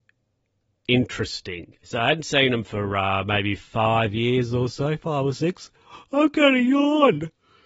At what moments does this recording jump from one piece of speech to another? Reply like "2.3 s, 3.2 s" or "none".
1.8 s